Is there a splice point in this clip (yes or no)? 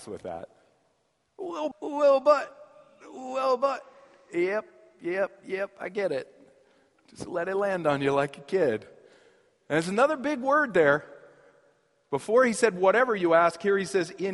yes